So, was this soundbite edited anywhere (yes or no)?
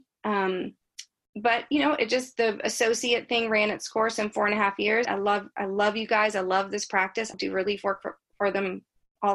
yes